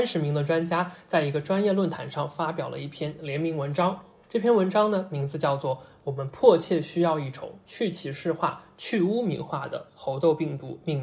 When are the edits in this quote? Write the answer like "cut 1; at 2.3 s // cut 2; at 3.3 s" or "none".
none